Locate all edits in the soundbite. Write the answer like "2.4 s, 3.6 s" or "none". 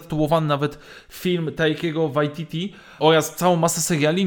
3.0 s